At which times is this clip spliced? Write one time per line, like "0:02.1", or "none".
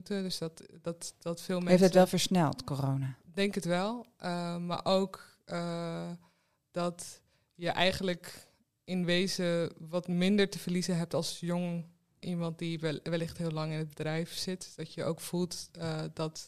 0:12.2